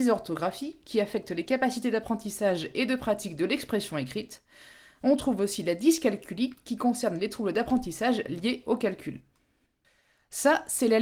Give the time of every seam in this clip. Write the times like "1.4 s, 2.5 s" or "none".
none